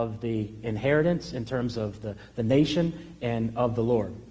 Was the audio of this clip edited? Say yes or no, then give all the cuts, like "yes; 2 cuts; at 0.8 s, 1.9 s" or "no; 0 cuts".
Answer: no; 0 cuts